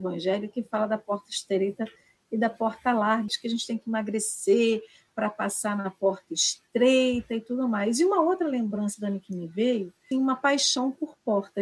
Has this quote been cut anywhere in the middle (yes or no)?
yes